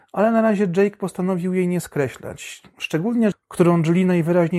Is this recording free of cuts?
no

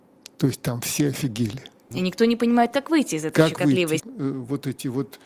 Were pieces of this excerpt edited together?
yes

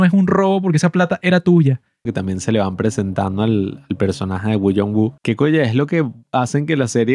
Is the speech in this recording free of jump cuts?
no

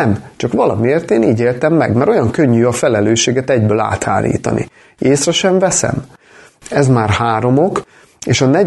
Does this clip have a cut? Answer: yes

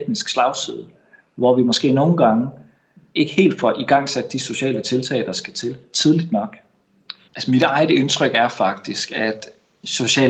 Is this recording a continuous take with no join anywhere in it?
no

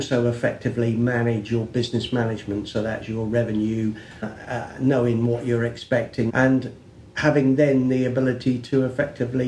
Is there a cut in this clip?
yes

